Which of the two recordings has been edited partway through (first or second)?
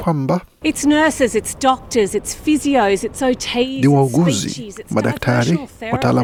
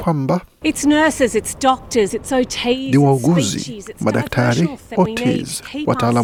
second